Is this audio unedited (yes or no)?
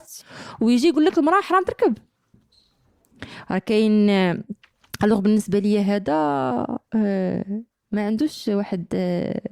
no